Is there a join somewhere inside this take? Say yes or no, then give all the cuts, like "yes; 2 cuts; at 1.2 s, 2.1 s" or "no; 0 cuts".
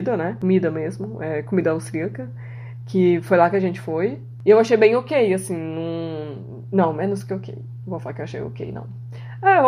no; 0 cuts